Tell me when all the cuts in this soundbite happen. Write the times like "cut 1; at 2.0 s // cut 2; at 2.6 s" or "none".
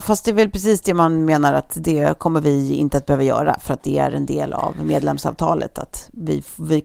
none